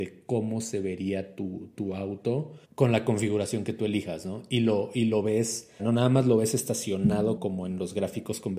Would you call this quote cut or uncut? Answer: cut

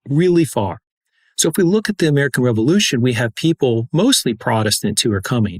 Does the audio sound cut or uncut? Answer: uncut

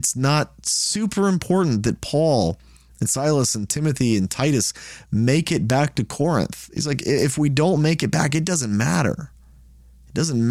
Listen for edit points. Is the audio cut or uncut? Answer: uncut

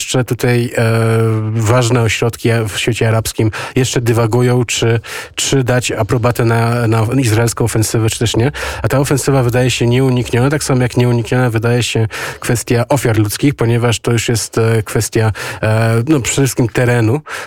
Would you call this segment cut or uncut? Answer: uncut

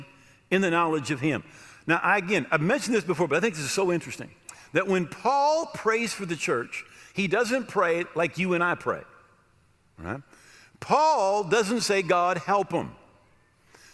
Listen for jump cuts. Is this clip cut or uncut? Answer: uncut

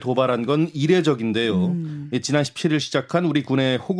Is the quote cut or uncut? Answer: uncut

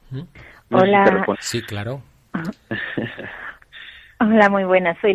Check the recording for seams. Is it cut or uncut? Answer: cut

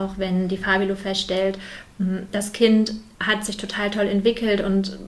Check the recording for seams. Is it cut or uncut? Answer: cut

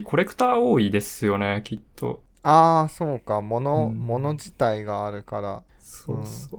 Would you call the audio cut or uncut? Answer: uncut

